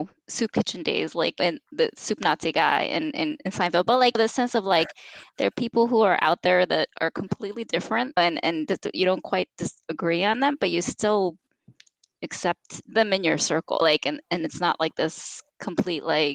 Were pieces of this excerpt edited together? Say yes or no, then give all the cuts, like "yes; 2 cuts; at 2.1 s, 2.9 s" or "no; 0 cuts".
no; 0 cuts